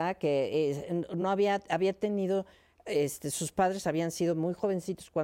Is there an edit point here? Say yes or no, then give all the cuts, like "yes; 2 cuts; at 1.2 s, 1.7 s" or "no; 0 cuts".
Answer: no; 0 cuts